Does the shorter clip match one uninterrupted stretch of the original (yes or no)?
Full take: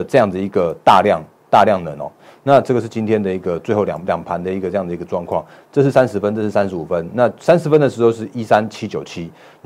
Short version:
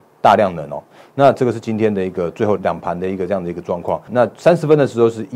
no